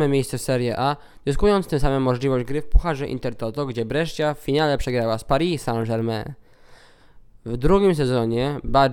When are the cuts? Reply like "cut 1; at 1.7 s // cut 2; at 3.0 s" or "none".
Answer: none